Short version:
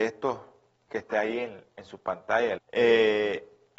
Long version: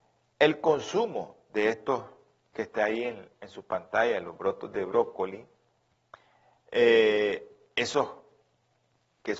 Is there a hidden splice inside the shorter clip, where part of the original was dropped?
yes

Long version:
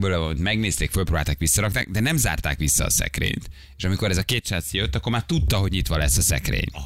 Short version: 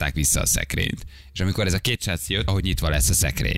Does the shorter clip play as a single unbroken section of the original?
no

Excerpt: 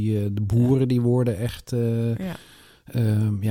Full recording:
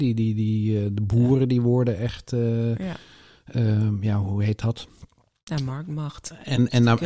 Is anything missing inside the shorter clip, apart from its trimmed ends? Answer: no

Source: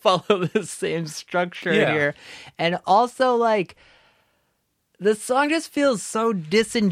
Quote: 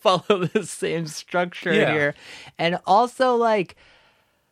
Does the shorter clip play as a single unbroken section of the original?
yes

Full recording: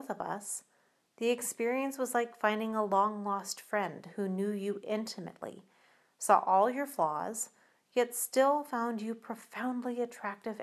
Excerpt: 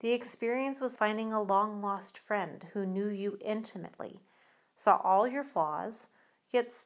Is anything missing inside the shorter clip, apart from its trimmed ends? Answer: yes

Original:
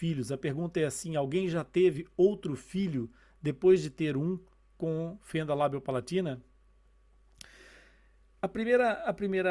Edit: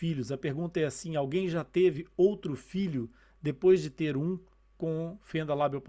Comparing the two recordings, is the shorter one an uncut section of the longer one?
yes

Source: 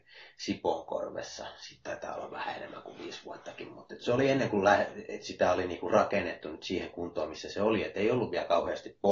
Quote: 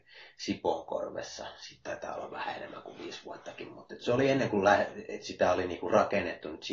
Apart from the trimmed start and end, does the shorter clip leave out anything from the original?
no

